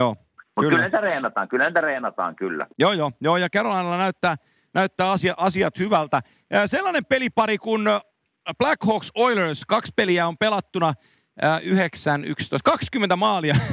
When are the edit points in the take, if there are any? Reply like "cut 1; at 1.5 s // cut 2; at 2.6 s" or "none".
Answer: none